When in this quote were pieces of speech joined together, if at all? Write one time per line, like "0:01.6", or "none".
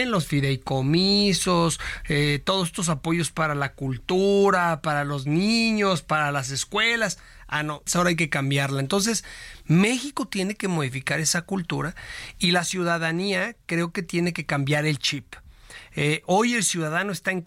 0:07.9